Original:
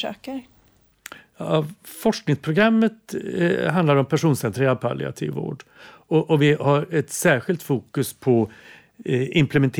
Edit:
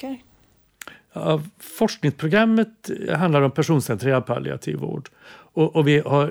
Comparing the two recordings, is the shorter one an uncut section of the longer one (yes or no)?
no